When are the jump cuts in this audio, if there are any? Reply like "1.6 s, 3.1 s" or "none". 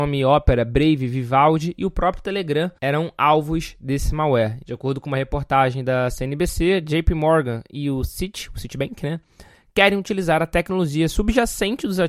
2.8 s, 4.6 s